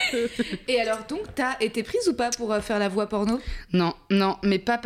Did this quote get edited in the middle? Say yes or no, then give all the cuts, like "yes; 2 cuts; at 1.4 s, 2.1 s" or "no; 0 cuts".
no; 0 cuts